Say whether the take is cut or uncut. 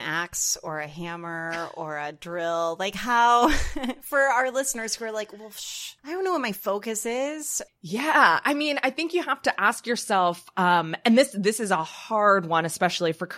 cut